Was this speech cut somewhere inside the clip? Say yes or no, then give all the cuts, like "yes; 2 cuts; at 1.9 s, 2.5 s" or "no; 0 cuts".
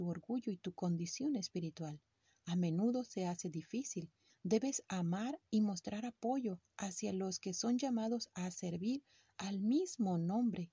yes; 1 cut; at 4.3 s